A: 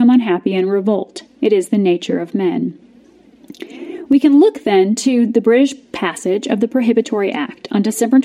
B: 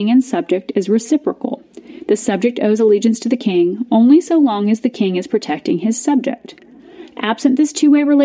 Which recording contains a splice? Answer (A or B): B